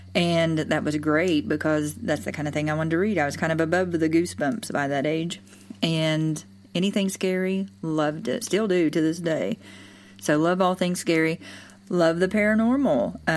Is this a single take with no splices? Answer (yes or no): no